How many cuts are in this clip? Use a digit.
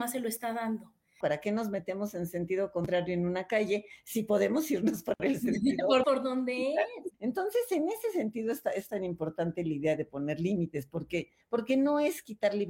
3